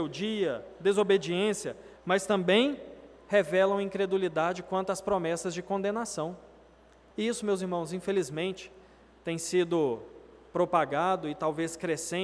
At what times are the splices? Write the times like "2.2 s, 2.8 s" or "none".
1.9 s, 7.1 s